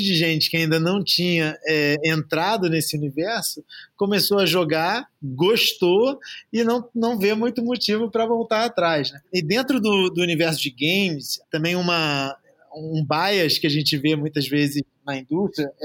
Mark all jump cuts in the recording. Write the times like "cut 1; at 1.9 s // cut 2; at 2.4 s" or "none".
none